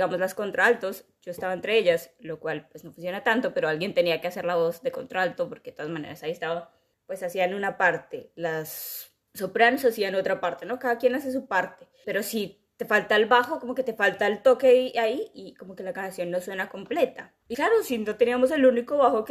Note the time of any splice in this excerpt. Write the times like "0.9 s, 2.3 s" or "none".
17.5 s

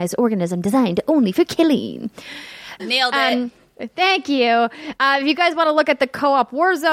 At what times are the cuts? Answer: 2.8 s

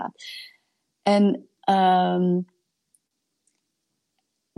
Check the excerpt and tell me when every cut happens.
none

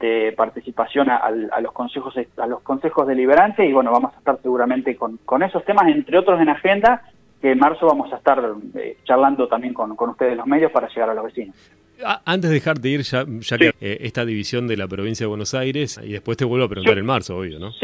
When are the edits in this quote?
13.7 s, 15.9 s

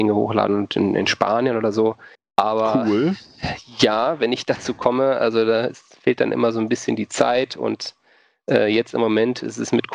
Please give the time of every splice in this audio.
2.1 s

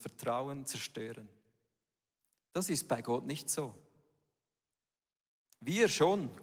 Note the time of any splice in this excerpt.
none

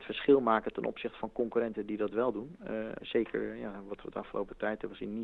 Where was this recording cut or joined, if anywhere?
3.0 s

